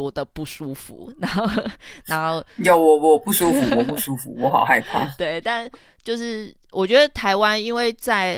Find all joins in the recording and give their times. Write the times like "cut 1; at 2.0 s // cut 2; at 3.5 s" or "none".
none